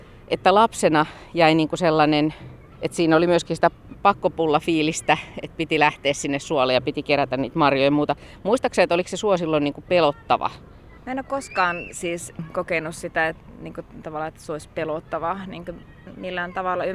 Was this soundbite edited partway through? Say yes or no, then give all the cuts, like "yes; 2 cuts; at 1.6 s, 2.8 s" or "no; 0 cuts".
no; 0 cuts